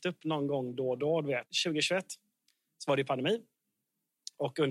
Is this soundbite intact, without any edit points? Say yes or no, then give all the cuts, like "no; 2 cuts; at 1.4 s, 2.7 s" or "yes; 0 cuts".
yes; 0 cuts